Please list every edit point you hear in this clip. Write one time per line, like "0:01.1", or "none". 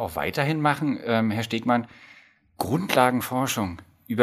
none